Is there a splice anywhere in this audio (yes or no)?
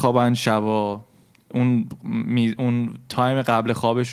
no